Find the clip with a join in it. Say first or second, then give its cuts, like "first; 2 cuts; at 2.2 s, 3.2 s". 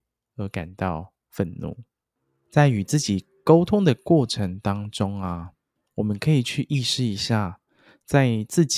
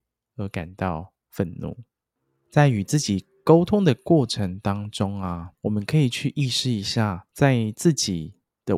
second; 2 cuts; at 5.5 s, 7.3 s